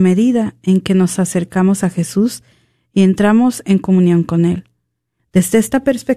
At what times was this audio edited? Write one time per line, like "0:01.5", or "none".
0:05.2